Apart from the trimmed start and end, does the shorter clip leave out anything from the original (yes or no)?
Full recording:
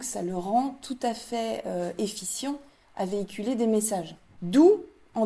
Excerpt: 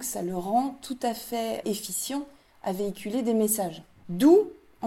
yes